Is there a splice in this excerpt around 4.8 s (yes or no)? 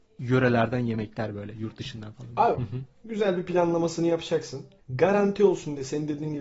yes